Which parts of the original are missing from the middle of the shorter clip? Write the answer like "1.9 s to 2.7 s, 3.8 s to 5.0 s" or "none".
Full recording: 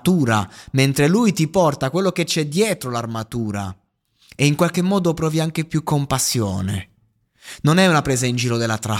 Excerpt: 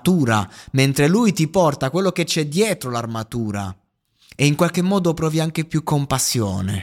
none